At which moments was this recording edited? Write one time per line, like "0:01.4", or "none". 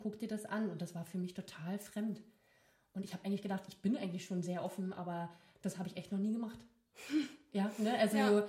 none